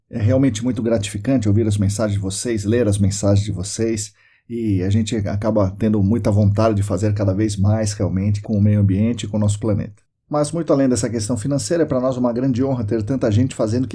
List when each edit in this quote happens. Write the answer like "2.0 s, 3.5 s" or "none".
8.4 s, 10.2 s

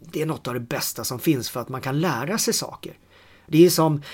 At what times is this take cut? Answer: none

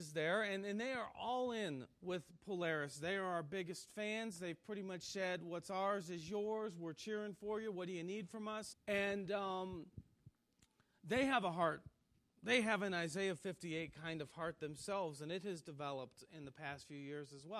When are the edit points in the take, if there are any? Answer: 8.7 s

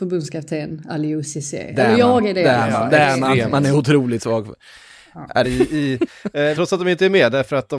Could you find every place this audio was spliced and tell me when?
5.4 s, 6.5 s

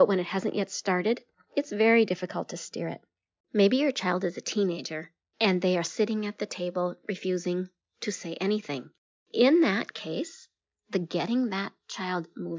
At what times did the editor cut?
none

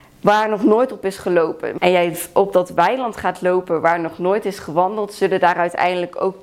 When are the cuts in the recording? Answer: 1.8 s

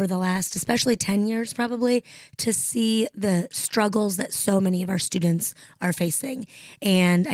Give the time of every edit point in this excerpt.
none

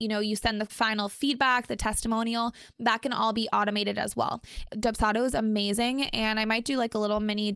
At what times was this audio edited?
4.7 s

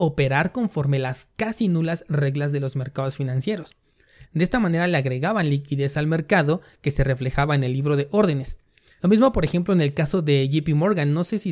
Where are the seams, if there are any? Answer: 4.3 s, 9.0 s

